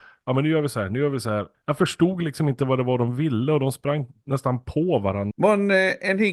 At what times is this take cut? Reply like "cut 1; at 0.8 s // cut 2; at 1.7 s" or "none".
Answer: cut 1; at 1.5 s // cut 2; at 5.3 s